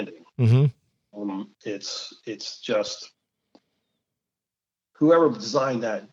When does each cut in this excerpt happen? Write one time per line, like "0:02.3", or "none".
none